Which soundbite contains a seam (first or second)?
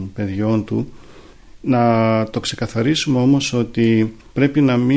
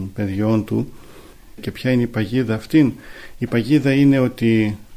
second